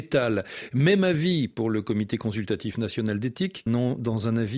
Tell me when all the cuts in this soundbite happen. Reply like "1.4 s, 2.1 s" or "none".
3.7 s